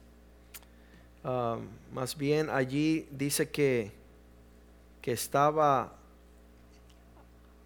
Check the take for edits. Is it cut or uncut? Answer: uncut